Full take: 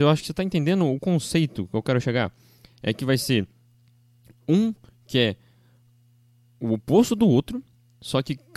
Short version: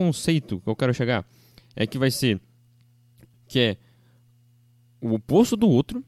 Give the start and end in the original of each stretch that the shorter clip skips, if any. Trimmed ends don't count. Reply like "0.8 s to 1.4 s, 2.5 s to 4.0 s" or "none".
4.4 s to 4.9 s

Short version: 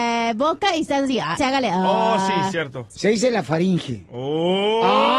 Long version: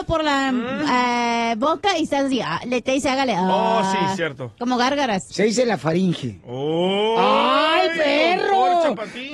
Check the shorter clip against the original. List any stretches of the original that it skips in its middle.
2.6 s to 3.0 s, 4.5 s to 5.2 s

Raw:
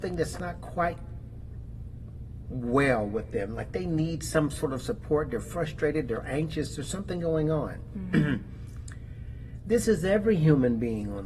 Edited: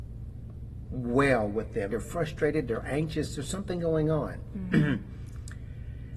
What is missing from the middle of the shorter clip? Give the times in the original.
3.5 s to 5.3 s

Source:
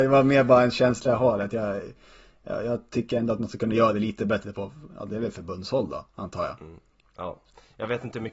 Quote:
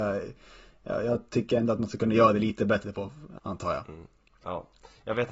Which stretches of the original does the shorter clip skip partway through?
5.0 s to 6.1 s

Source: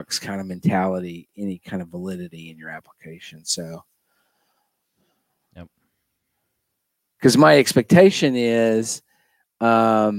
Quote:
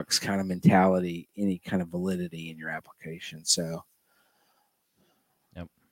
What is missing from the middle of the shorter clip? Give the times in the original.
none

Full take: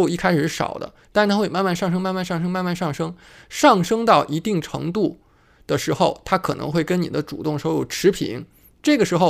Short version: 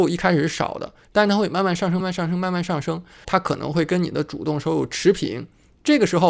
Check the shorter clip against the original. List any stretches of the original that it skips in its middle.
2.0 s to 2.1 s, 3.4 s to 6.2 s

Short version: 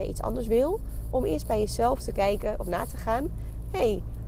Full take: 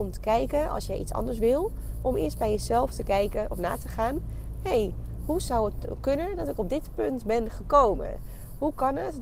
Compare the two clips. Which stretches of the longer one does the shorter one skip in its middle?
none

